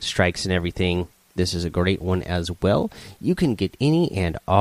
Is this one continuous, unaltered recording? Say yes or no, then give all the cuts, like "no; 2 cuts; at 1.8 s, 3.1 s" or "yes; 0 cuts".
no; 1 cut; at 1.4 s